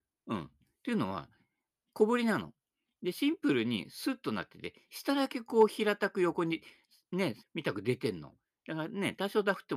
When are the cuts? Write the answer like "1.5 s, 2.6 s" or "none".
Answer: 7.4 s